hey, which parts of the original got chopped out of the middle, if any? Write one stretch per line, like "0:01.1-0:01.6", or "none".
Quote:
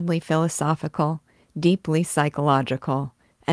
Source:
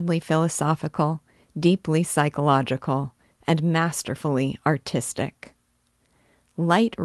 none